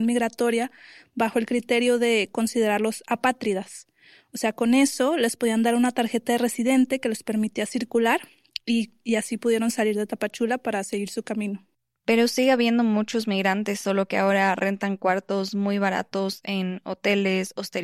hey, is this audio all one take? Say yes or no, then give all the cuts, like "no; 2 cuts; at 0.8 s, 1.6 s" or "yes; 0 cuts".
yes; 0 cuts